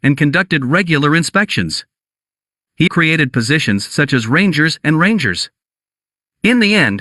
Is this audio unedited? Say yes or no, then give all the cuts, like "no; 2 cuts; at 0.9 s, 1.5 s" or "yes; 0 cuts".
no; 1 cut; at 2.9 s